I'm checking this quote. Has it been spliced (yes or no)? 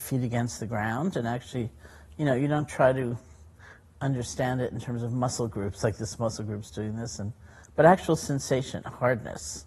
no